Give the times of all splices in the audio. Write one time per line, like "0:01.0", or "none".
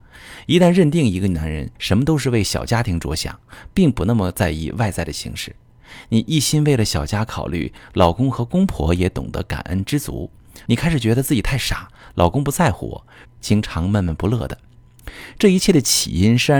0:01.8
0:10.7
0:13.3